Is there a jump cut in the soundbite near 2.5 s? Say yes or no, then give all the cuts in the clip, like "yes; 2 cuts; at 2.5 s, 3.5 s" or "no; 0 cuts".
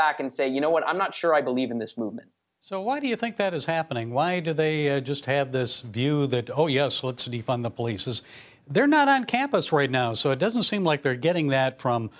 no; 0 cuts